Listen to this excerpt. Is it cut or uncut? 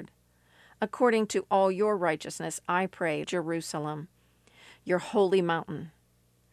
cut